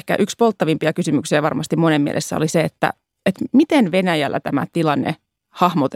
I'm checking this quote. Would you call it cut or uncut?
uncut